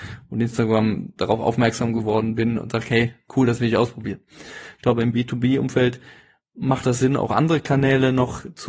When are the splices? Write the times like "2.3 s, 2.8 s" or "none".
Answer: 4.7 s

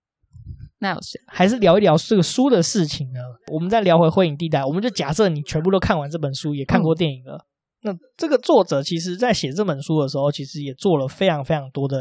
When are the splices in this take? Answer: 1.2 s

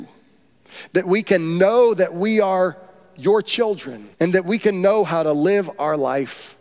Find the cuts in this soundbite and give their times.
4.1 s

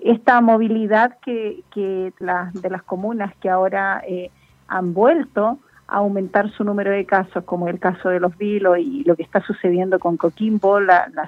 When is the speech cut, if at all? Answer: 2.2 s

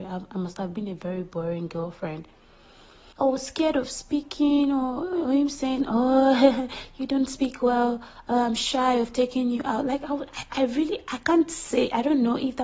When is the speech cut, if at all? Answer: 3.1 s

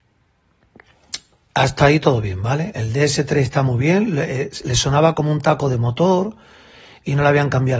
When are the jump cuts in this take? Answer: none

